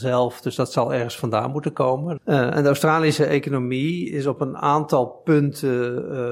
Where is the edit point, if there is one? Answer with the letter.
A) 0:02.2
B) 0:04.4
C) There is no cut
A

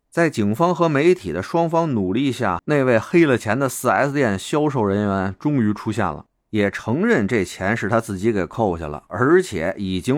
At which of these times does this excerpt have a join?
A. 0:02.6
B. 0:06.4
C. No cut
A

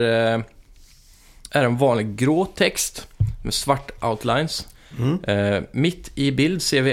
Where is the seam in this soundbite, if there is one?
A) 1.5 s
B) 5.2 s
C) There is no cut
A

